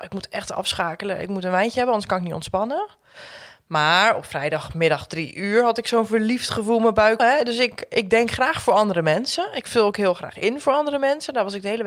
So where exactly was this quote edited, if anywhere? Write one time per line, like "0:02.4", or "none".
0:07.2